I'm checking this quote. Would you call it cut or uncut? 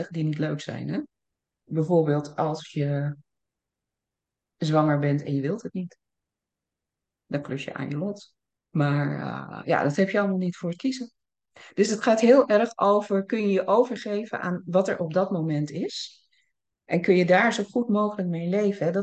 cut